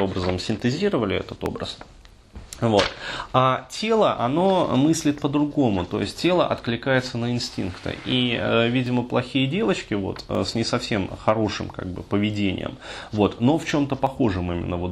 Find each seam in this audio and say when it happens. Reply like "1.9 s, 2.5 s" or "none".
none